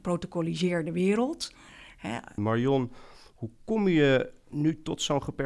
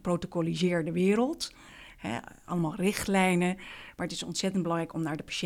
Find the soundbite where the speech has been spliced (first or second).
first